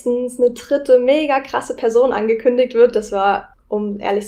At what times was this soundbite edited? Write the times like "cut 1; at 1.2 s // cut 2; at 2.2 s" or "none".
none